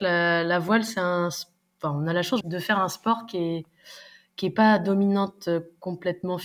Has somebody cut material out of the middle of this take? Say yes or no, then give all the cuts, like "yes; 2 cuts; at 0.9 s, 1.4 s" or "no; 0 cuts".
yes; 1 cut; at 2.4 s